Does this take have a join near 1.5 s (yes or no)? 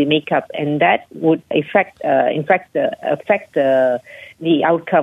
yes